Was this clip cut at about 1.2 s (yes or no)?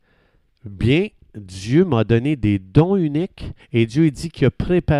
no